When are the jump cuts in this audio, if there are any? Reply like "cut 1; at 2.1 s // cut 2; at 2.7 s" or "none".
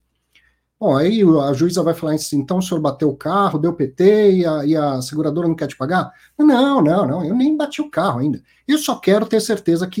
none

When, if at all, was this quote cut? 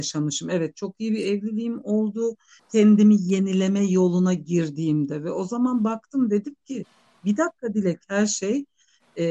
cut 1; at 2.6 s

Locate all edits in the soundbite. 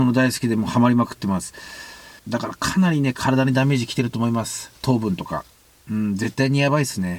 cut 1; at 2.2 s

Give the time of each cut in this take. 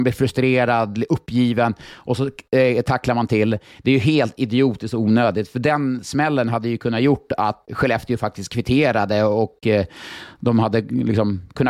cut 1; at 7.7 s

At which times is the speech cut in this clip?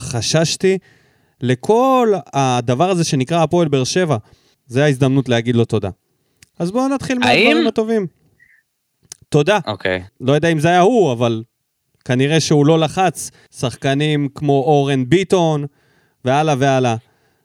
cut 1; at 4.5 s // cut 2; at 10.1 s // cut 3; at 13.5 s

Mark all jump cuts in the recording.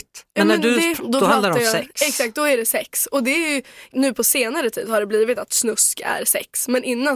cut 1; at 1.0 s

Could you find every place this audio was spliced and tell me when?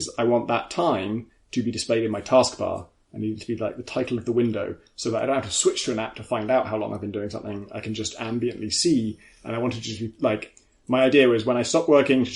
none

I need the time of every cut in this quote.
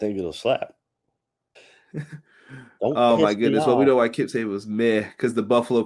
cut 1; at 1.6 s

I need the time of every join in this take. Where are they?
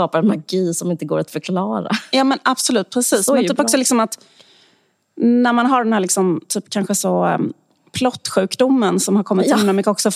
none

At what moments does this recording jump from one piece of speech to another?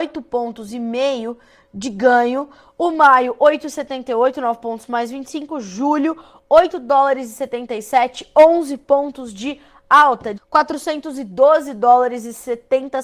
cut 1; at 10.4 s

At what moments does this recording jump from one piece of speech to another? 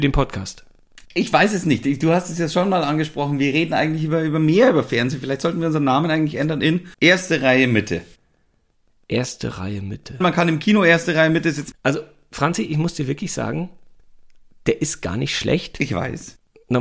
cut 1; at 6.9 s // cut 2; at 10.2 s // cut 3; at 11.7 s

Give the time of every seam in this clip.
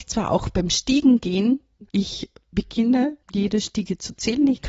cut 1; at 1.9 s // cut 2; at 3.2 s

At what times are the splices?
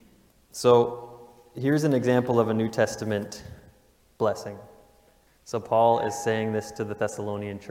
cut 1; at 5.3 s

